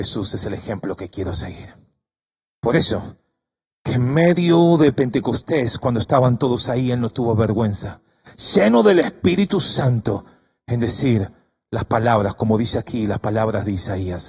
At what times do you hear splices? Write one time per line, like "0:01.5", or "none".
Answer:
none